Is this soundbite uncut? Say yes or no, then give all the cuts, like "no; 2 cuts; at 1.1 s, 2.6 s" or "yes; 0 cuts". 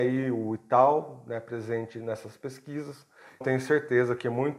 no; 1 cut; at 3.4 s